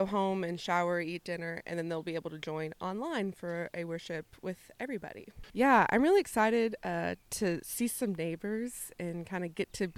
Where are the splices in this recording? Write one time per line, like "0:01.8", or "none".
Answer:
0:05.5